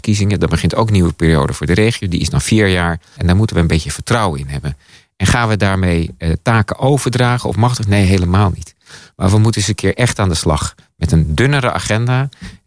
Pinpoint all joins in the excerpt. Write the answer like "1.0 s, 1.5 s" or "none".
3.2 s